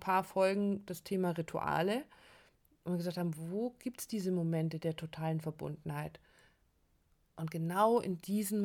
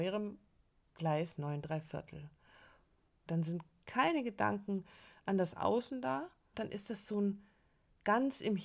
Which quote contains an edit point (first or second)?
second